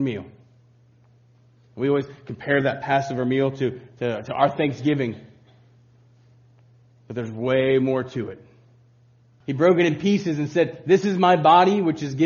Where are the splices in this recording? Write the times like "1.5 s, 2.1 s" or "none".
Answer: 9.4 s